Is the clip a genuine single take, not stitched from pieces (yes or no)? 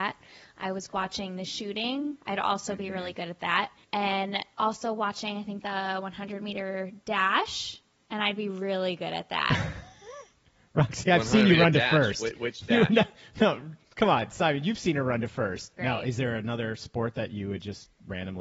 no